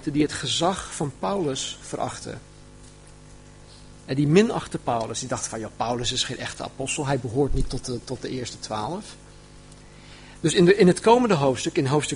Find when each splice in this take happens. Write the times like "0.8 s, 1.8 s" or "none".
none